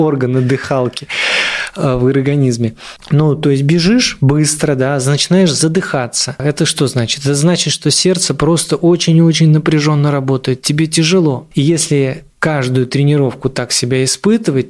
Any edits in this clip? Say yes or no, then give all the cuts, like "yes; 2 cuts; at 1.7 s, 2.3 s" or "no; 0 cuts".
yes; 1 cut; at 11.5 s